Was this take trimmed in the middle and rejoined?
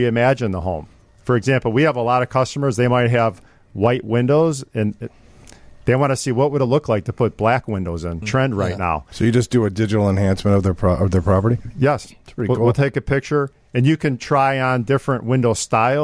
yes; 1 cut; at 8.2 s

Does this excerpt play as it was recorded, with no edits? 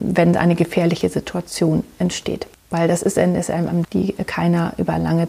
no; 2 cuts; at 2.5 s, 3.8 s

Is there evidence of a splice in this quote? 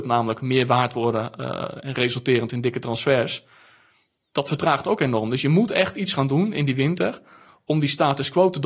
no; 0 cuts

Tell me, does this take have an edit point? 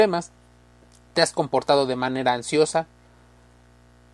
no; 0 cuts

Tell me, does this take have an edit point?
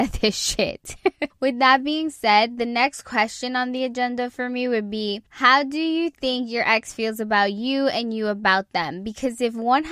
yes; 2 cuts; at 1.3 s, 5.3 s

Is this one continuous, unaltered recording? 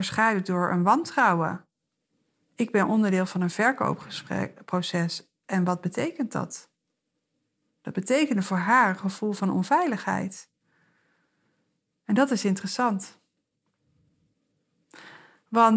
yes; 0 cuts

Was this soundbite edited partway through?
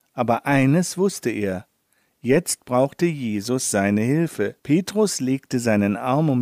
yes; 1 cut; at 4.6 s

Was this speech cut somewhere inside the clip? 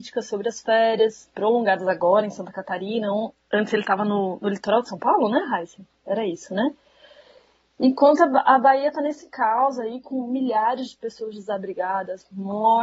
no; 0 cuts

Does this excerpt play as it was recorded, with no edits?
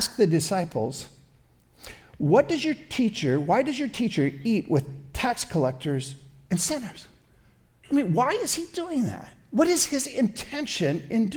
yes; 0 cuts

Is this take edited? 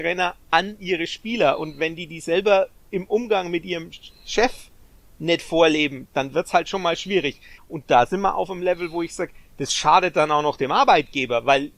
yes; 1 cut; at 7.6 s

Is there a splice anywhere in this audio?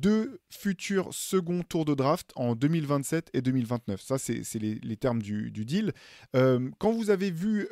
no; 0 cuts

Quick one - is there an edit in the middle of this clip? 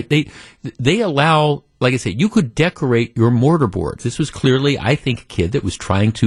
yes; 1 cut; at 4.0 s

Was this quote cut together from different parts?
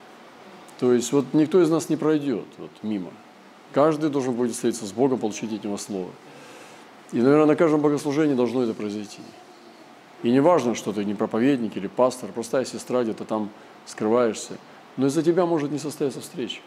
yes; 1 cut; at 10.2 s

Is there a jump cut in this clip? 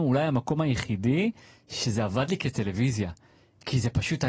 no; 0 cuts

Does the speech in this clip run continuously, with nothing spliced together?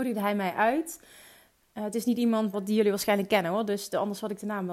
no; 1 cut; at 2.5 s

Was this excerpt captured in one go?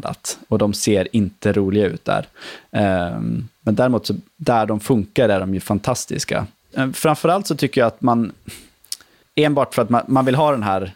no; 2 cuts; at 6.7 s, 9.2 s

